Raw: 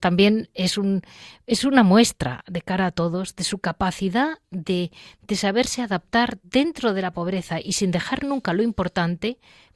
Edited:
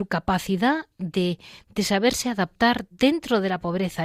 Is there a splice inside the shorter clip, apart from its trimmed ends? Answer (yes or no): no